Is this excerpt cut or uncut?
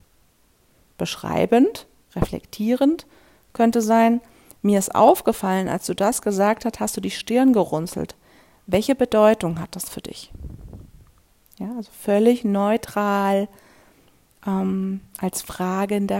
uncut